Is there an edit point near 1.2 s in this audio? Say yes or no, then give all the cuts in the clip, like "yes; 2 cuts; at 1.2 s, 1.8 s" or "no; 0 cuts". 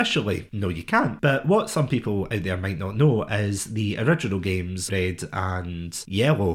no; 1 cut; at 4.9 s